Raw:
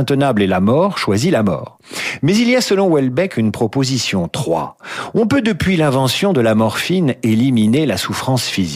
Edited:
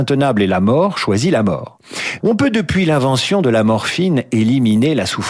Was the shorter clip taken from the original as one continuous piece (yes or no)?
no